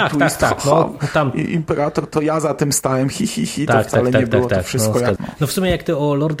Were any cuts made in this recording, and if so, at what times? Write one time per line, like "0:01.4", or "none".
0:05.2